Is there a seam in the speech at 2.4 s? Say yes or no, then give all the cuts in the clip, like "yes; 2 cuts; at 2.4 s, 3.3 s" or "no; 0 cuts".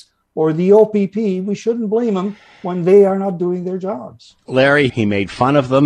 no; 1 cut; at 4.9 s